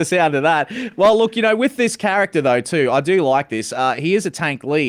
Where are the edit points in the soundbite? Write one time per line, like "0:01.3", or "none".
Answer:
none